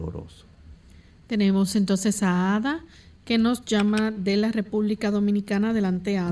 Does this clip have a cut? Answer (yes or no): no